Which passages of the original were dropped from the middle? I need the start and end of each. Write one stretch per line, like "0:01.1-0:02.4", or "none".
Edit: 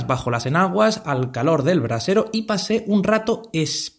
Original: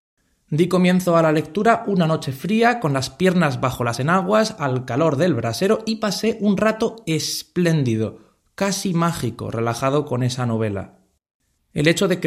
none